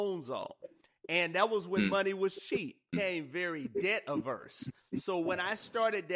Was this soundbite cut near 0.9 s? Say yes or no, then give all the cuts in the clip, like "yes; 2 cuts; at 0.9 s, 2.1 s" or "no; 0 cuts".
no; 2 cuts; at 2.9 s, 4.8 s